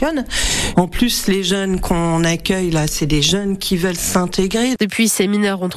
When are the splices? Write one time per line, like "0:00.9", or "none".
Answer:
0:04.8